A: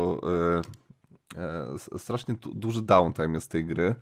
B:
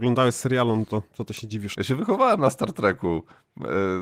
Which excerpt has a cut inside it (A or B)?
B